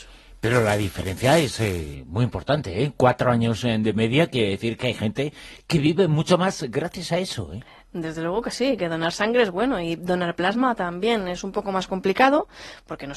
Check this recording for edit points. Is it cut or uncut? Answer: uncut